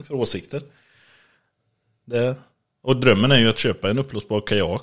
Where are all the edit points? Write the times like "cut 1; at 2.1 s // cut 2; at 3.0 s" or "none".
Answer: none

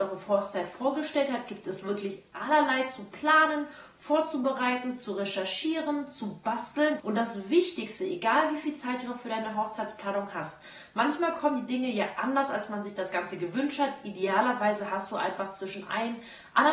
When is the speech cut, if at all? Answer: cut 1; at 7.0 s

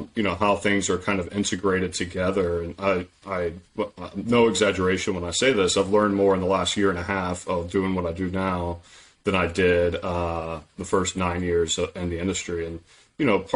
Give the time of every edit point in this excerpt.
none

